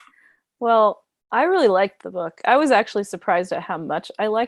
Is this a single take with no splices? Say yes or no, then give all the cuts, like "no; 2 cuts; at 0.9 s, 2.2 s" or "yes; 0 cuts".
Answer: yes; 0 cuts